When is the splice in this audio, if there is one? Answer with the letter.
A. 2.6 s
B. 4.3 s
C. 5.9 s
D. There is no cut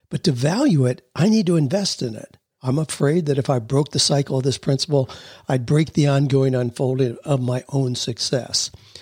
A